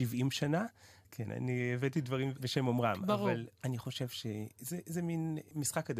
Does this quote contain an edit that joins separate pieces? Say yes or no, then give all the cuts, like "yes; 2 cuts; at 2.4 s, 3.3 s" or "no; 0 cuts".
yes; 1 cut; at 1.0 s